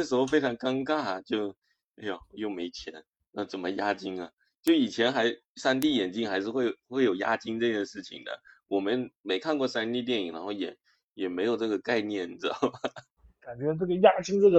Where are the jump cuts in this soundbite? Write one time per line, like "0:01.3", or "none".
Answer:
none